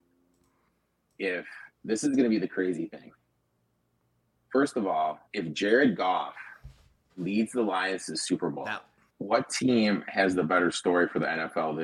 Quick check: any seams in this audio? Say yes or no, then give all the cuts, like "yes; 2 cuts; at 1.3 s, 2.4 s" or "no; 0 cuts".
yes; 2 cuts; at 5.3 s, 9.1 s